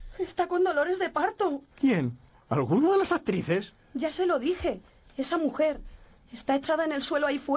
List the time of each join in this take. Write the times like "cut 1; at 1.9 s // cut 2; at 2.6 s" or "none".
none